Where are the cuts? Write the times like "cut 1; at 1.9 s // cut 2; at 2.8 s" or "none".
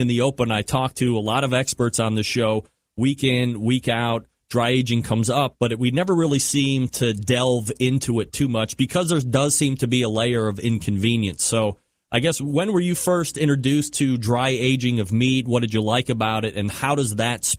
none